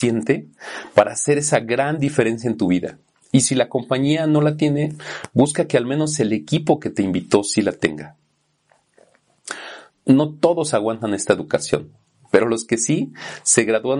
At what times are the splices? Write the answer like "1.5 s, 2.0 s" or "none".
9.9 s